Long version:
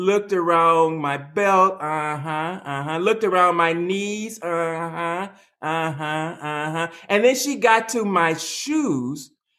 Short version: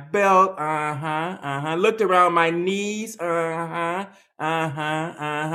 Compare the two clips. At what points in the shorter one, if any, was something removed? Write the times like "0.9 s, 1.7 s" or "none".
none

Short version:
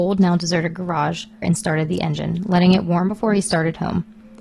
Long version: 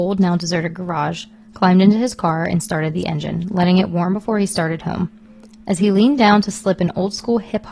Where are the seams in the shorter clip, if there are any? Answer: 1.4 s

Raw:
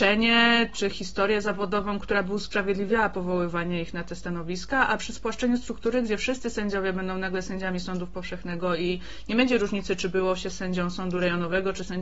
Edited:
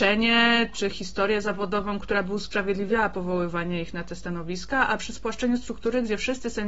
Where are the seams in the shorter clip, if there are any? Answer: none

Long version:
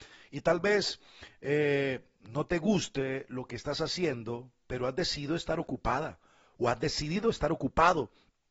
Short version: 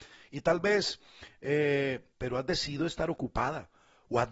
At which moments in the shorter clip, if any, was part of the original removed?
2.1 s

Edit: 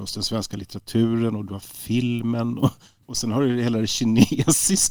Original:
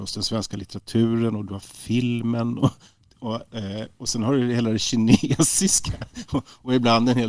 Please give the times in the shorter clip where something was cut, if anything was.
3.0 s

